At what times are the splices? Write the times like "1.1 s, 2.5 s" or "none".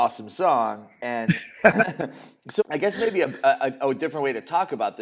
2.6 s

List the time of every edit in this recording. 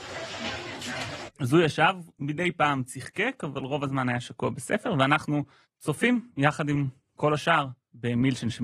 1.3 s, 5.6 s

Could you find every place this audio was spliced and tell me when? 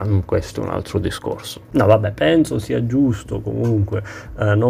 1.7 s

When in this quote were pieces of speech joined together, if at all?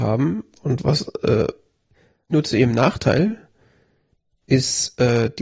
2.3 s

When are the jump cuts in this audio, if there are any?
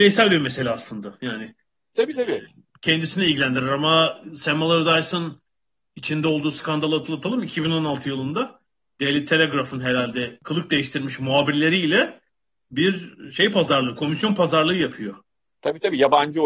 1.9 s

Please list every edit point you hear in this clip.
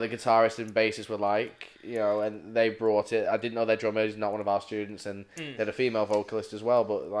none

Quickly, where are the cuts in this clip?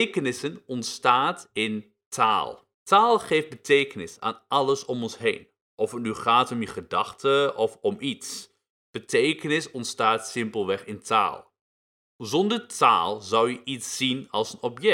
2.7 s

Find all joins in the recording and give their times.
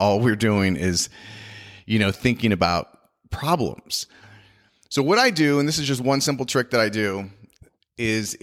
none

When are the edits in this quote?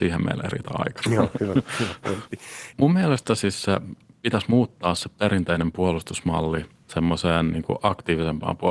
2.7 s

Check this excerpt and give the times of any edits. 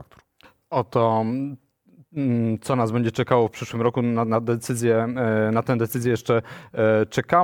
none

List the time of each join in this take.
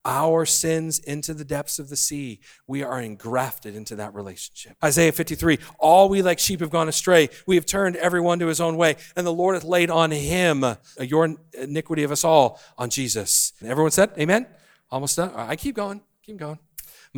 4.8 s, 11.0 s, 13.6 s

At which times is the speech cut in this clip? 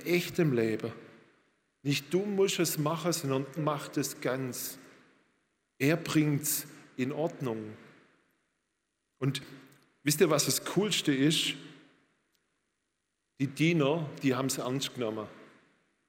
3.6 s

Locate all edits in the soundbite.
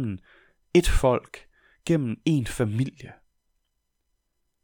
none

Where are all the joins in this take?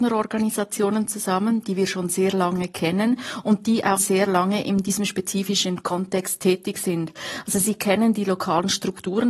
4.0 s

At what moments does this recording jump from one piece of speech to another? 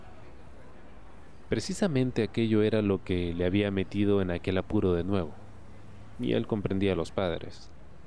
6.1 s

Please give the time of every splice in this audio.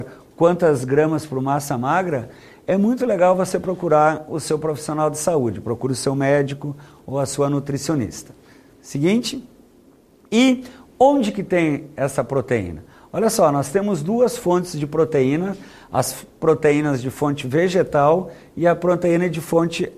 none

